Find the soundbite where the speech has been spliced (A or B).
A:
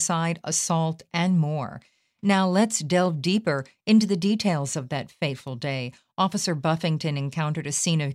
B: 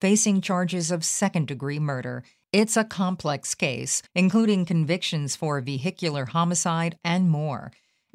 B